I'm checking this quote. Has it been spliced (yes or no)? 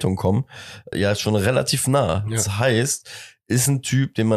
yes